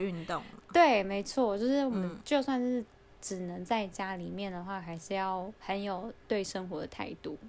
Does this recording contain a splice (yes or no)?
yes